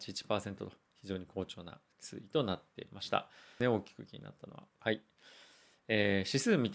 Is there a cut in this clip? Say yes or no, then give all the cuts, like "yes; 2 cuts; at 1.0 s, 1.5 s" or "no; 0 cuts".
yes; 2 cuts; at 3.6 s, 4.7 s